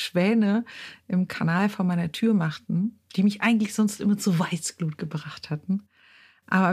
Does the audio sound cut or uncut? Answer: uncut